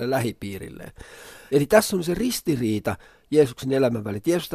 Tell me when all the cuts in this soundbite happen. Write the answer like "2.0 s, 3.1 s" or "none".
1.5 s